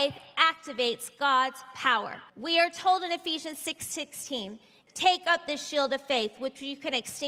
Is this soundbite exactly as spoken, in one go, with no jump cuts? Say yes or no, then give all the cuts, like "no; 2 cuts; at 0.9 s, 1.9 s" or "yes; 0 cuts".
no; 2 cuts; at 2.3 s, 4.9 s